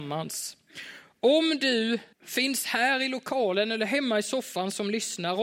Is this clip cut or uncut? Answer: cut